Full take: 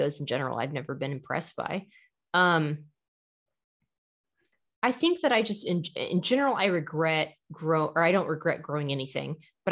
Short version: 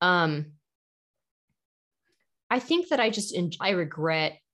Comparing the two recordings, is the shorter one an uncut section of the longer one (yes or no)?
no